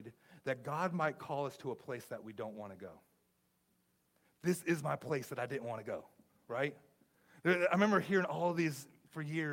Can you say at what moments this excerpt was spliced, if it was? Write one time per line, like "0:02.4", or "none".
none